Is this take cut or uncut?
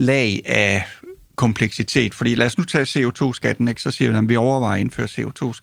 uncut